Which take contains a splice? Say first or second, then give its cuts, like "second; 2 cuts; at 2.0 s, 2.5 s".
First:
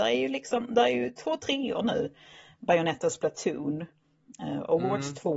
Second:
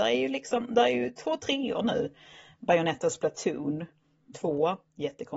second; 1 cut; at 4.3 s